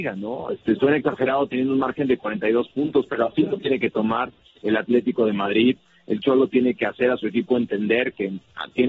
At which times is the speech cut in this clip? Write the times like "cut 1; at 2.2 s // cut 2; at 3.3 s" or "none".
none